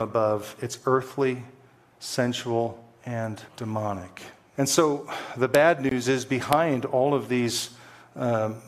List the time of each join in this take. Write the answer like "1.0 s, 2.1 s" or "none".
3.5 s